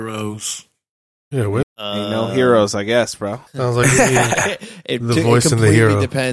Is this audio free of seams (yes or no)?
no